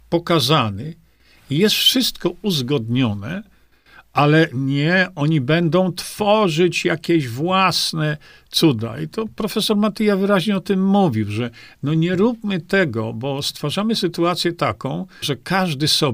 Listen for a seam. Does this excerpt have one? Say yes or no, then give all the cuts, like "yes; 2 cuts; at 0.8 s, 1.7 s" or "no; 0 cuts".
yes; 1 cut; at 15.2 s